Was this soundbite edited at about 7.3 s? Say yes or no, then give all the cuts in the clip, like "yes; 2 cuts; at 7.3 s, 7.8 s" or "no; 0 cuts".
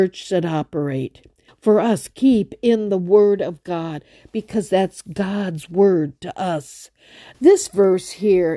yes; 2 cuts; at 1.5 s, 7.3 s